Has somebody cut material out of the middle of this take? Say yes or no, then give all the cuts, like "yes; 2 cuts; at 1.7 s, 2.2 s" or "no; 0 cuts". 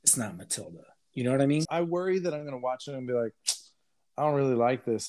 yes; 1 cut; at 1.7 s